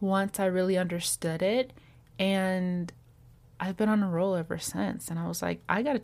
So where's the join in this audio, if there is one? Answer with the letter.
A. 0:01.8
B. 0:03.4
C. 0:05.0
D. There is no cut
D